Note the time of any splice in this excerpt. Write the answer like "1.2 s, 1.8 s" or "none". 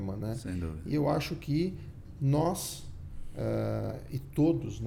none